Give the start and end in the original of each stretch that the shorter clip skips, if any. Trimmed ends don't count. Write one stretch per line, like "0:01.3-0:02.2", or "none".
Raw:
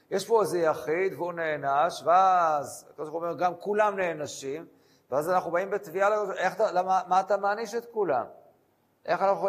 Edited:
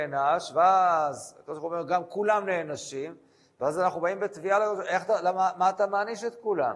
none